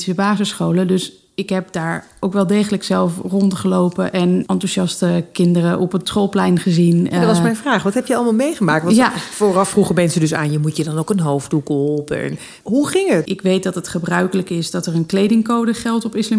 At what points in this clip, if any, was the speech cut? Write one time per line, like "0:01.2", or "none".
0:13.3